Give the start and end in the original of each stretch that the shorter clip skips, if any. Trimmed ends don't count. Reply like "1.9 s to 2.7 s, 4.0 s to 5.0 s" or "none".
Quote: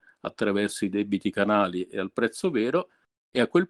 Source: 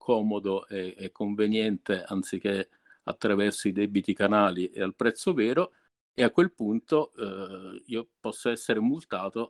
none